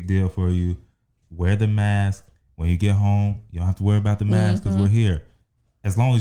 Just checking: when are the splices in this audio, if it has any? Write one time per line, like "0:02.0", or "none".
none